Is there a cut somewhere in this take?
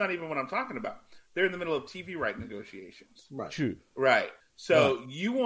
yes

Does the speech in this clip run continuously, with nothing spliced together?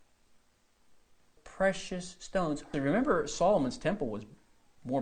no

